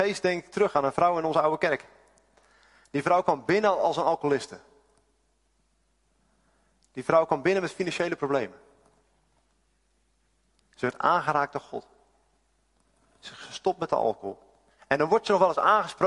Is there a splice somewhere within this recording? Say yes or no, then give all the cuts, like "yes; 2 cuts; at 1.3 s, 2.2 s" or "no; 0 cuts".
yes; 1 cut; at 14.8 s